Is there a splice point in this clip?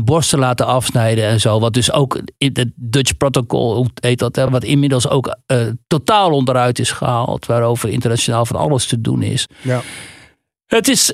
no; 0 cuts

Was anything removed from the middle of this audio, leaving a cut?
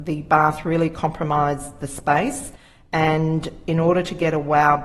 no; 0 cuts

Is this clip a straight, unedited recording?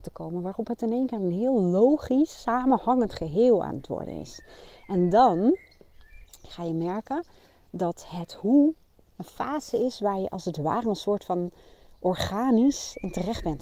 yes; 0 cuts

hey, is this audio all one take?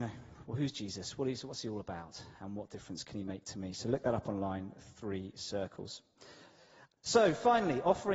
yes; 0 cuts

